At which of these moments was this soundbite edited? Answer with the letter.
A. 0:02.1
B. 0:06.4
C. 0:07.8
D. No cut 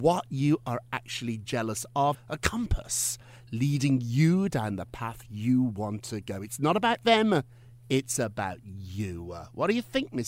A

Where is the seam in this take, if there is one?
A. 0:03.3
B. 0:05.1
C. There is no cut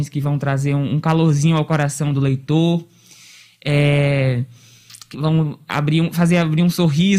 B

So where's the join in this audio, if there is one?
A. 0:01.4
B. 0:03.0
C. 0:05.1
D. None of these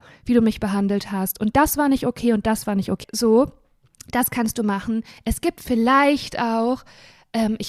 B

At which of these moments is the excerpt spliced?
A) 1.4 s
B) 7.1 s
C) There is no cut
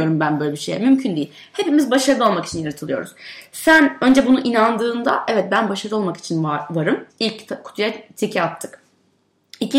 B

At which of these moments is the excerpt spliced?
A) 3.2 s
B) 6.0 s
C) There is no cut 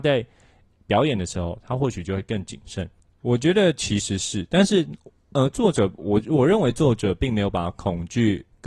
A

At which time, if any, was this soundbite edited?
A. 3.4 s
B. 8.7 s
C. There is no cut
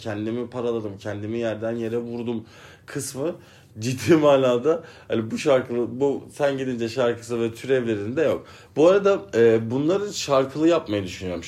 B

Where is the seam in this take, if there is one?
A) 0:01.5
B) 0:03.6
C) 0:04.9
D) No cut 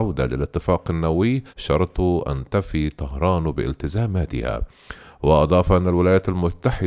A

